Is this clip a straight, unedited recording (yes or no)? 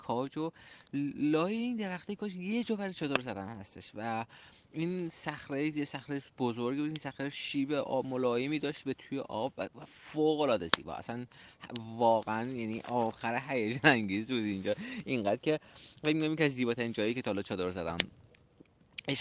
yes